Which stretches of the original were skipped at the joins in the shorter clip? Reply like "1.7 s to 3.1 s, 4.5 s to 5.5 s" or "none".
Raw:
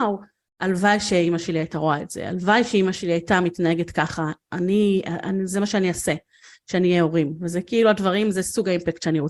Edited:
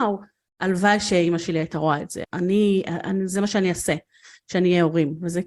2.2 s to 4.4 s